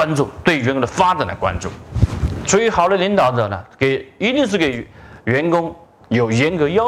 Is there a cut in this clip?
yes; 1 cut; at 2.4 s

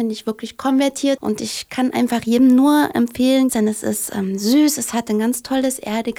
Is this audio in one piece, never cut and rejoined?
no; 2 cuts; at 1.2 s, 3.5 s

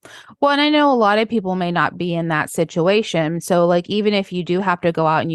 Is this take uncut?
yes; 0 cuts

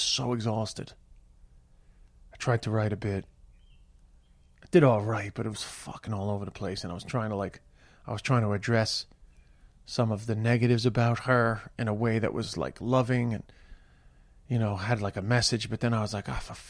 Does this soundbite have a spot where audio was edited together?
no; 0 cuts

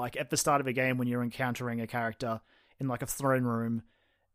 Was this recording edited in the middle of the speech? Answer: no; 0 cuts

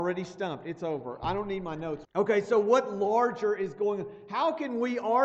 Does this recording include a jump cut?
yes; 1 cut; at 2.0 s

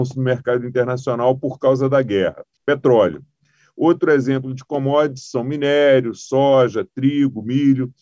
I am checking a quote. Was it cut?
yes; 1 cut; at 2.6 s

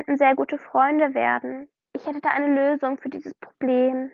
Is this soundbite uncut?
no; 1 cut; at 1.9 s

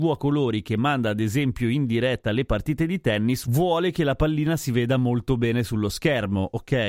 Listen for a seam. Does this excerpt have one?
no; 0 cuts

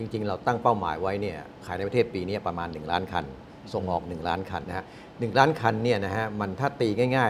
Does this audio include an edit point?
yes; 1 cut; at 4.6 s

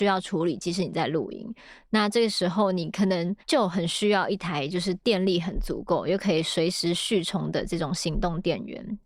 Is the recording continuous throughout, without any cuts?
no; 1 cut; at 3.4 s

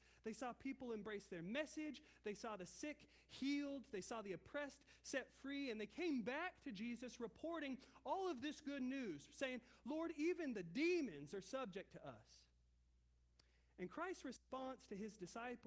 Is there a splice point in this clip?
no; 0 cuts

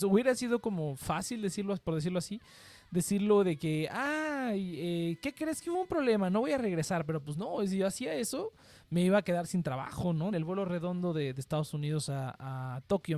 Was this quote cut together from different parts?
yes; 1 cut; at 10.3 s

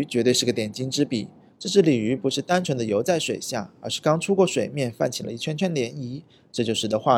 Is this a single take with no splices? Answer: yes; 0 cuts

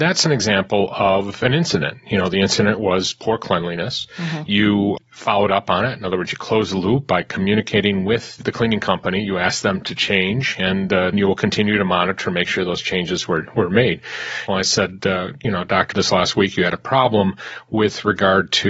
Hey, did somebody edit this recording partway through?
yes; 3 cuts; at 11.1 s, 14.5 s, 15.9 s

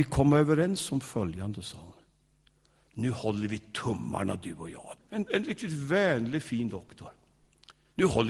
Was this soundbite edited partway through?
yes; 1 cut; at 5.0 s

